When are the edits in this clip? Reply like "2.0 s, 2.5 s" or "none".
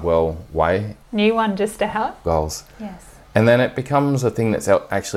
1.0 s, 2.2 s